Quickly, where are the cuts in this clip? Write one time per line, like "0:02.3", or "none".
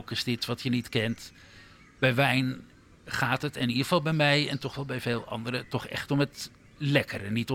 none